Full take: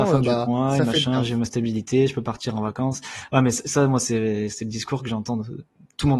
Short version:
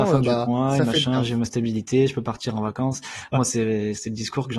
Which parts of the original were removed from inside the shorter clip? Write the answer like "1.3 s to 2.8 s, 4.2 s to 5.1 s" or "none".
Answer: 3.3 s to 3.9 s